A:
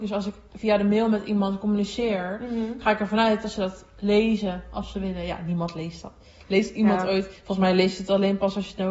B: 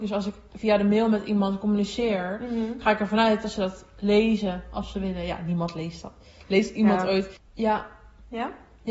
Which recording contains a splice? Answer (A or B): B